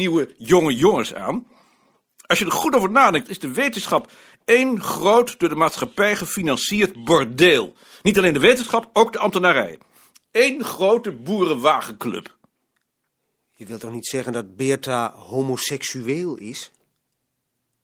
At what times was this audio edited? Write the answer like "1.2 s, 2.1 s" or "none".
none